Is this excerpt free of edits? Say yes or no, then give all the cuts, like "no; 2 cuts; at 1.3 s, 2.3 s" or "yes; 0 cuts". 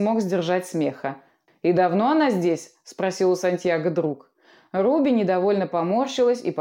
no; 1 cut; at 1.5 s